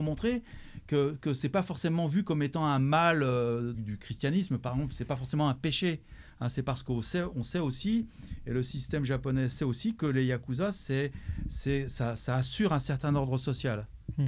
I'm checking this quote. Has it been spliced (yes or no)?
yes